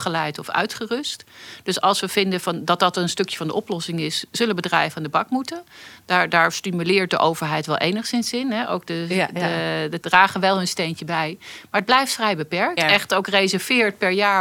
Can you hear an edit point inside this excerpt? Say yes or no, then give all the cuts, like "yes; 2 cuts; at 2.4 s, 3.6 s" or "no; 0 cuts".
yes; 2 cuts; at 10.0 s, 12.8 s